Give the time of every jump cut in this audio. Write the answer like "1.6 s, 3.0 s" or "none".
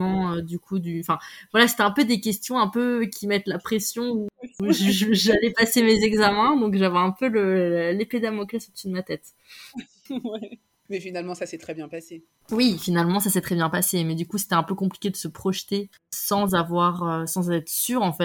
none